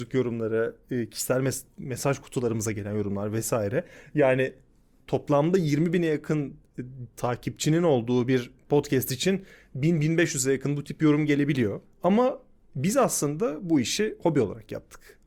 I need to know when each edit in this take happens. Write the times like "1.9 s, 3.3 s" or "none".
11.8 s